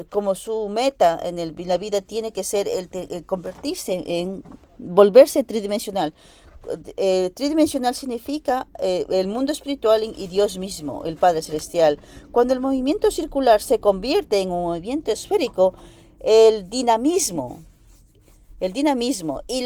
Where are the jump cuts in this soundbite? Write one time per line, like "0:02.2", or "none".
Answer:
none